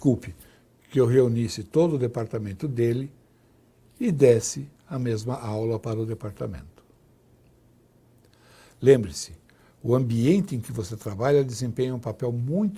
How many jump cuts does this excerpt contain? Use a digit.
0